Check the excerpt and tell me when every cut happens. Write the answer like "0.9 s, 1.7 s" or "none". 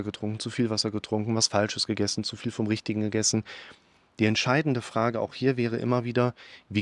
none